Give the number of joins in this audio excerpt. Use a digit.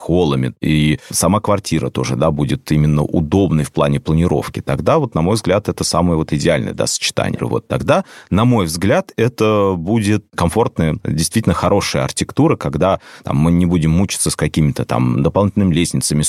1